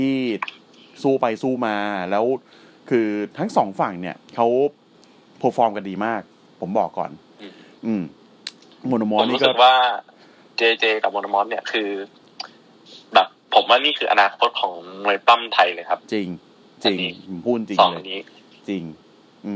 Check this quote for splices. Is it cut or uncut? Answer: uncut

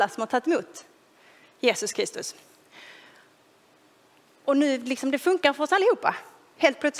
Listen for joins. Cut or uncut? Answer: uncut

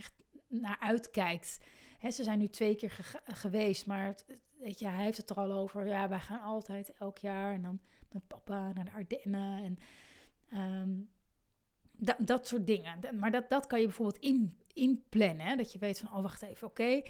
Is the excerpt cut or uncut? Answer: uncut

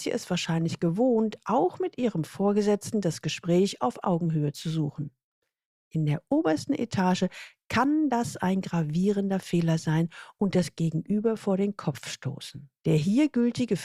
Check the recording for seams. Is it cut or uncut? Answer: cut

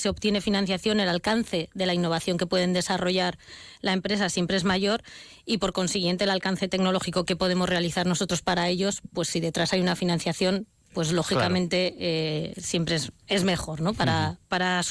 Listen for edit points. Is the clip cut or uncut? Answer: uncut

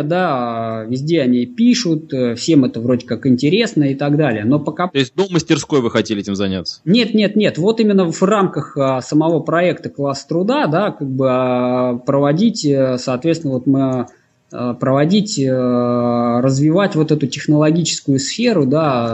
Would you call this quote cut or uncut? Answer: uncut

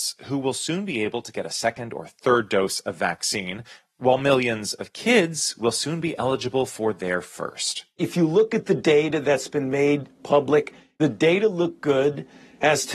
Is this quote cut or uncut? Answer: uncut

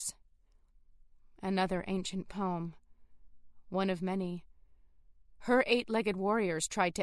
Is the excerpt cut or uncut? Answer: uncut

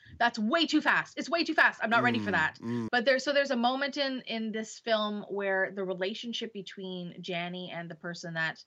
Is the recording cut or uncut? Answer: cut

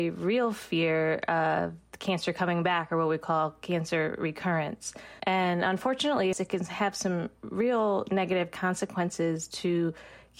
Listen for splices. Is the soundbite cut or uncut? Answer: cut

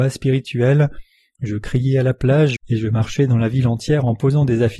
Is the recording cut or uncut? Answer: cut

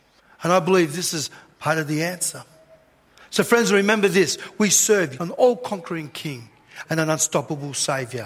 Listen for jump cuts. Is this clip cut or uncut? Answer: cut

